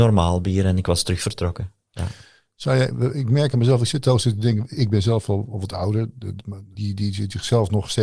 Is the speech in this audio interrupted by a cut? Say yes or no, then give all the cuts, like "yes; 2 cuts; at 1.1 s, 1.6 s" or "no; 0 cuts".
yes; 2 cuts; at 1.8 s, 6.7 s